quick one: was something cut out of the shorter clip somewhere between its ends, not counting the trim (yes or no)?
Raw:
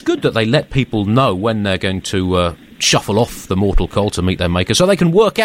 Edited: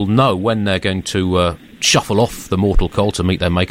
no